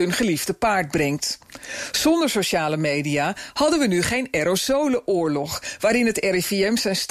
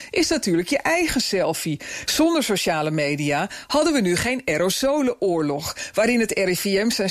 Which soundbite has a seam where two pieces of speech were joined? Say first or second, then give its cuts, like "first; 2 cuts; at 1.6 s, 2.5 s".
second; 1 cut; at 2.1 s